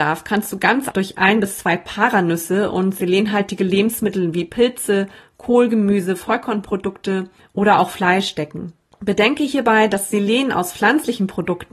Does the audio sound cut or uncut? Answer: cut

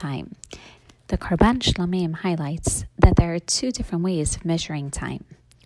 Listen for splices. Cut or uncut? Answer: uncut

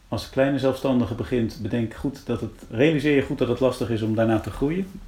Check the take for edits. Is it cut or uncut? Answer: cut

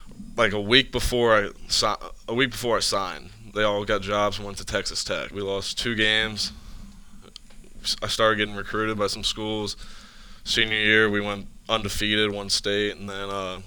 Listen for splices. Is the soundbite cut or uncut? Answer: cut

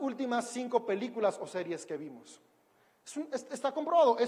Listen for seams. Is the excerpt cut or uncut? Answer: uncut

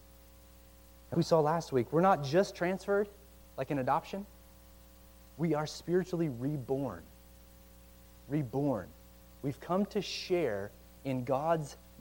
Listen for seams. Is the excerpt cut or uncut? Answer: cut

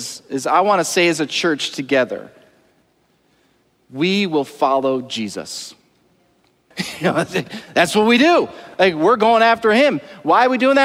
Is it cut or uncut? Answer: cut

